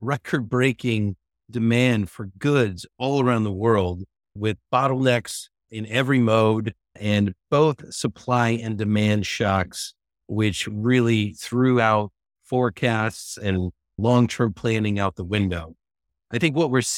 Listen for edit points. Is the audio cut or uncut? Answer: uncut